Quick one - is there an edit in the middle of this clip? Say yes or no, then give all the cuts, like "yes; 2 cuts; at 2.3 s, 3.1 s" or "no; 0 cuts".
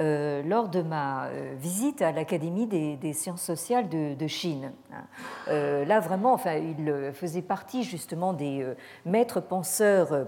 no; 0 cuts